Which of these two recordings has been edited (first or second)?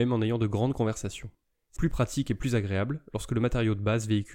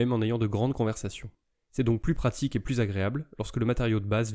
first